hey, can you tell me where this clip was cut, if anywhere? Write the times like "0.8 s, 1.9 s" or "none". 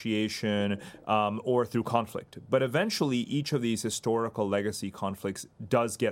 none